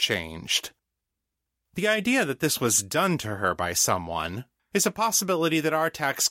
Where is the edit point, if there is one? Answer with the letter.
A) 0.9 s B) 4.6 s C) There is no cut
B